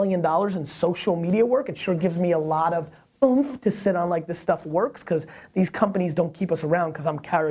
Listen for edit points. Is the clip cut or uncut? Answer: uncut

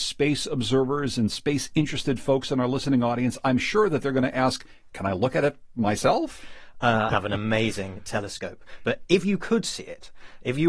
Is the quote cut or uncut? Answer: cut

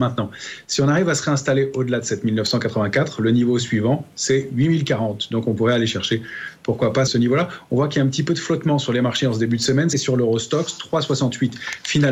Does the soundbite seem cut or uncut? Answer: cut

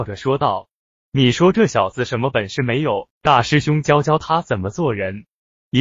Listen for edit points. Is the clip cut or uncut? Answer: cut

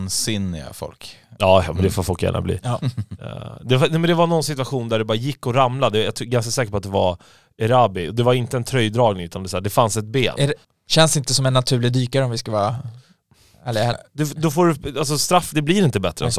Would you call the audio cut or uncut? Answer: cut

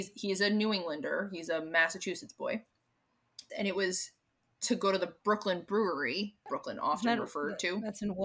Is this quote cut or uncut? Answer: cut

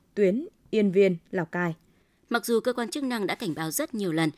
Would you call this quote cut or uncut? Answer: uncut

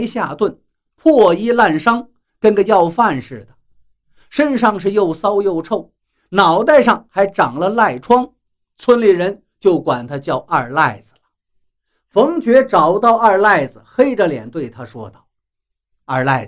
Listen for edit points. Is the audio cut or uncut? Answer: uncut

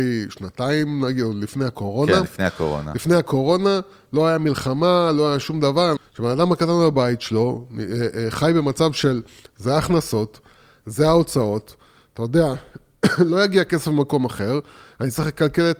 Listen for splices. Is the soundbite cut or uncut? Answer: cut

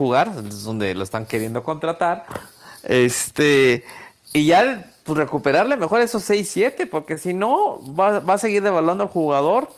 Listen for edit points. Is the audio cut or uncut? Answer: uncut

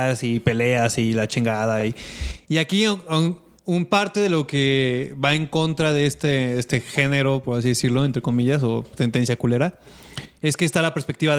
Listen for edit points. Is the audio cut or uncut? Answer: uncut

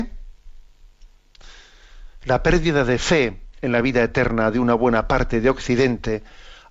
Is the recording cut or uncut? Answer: uncut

